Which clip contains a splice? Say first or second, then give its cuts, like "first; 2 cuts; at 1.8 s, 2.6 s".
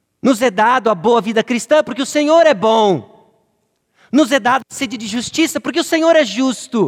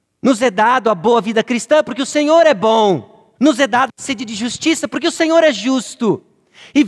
second; 1 cut; at 3.4 s